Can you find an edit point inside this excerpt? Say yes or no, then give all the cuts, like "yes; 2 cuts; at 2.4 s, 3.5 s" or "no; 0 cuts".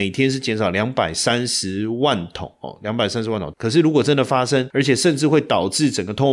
yes; 2 cuts; at 3.5 s, 4.7 s